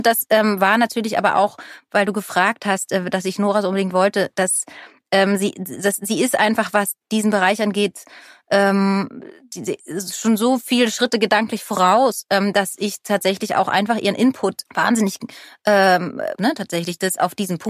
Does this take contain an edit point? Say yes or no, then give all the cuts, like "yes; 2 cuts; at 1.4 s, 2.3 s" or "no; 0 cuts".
yes; 2 cuts; at 14.7 s, 16.4 s